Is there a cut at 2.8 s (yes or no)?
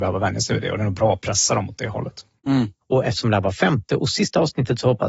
yes